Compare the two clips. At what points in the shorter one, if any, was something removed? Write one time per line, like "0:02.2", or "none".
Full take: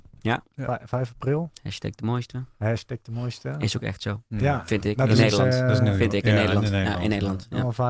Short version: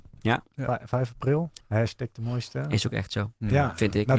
0:01.6